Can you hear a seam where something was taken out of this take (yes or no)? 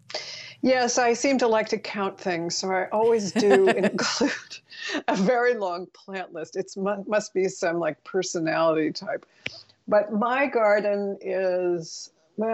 no